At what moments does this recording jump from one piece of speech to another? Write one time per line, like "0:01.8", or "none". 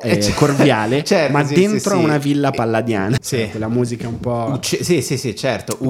0:03.2